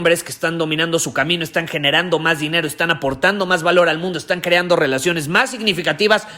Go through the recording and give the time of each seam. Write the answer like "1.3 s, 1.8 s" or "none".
none